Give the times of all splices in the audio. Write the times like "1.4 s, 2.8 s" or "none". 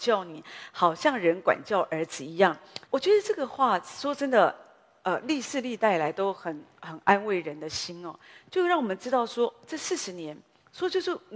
2.9 s